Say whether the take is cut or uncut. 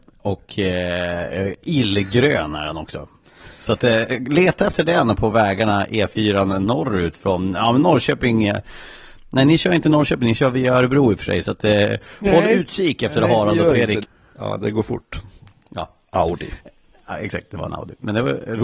cut